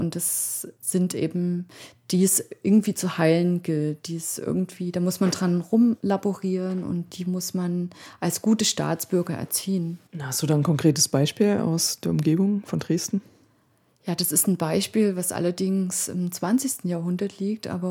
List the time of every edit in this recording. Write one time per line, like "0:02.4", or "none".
0:10.1